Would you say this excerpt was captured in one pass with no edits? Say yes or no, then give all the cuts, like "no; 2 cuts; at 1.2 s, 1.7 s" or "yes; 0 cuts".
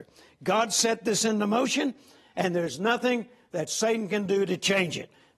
yes; 0 cuts